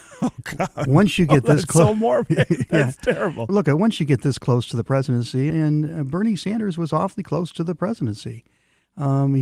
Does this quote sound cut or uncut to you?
cut